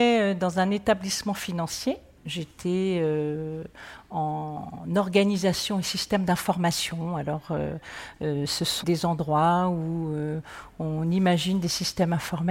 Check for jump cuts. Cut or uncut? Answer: cut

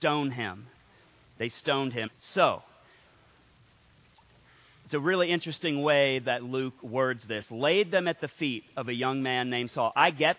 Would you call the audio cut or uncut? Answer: cut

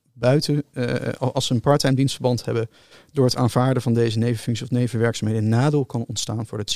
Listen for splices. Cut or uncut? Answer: uncut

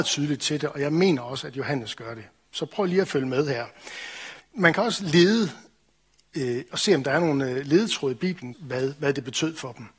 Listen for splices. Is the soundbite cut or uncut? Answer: cut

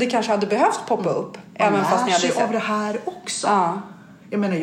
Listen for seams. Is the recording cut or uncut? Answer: uncut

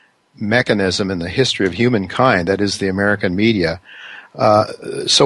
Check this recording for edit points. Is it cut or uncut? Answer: uncut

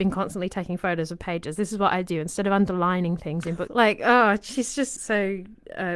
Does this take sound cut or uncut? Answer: cut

